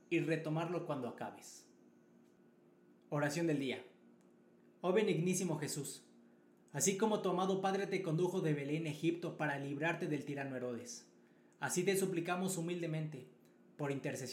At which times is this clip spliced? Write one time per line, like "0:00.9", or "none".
none